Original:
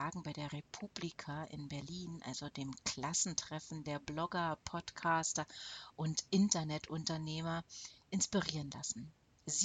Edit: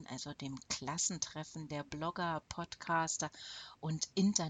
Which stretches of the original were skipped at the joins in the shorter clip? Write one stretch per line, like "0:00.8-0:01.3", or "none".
none

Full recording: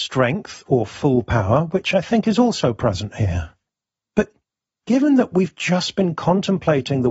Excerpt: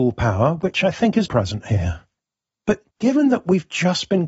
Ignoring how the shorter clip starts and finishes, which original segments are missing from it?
0:02.4-0:02.7
0:04.4-0:04.8

